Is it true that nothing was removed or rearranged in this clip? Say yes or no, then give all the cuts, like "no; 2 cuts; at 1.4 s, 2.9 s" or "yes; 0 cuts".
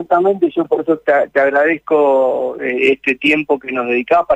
yes; 0 cuts